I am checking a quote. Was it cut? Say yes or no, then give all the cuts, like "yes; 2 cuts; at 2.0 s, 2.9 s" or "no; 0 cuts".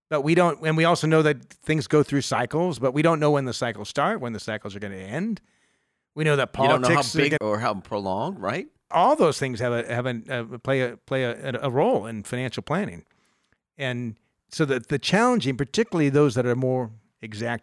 yes; 2 cuts; at 7.4 s, 8.9 s